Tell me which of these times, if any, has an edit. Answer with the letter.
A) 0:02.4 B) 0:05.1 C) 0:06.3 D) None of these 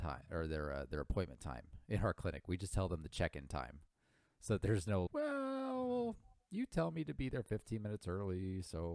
B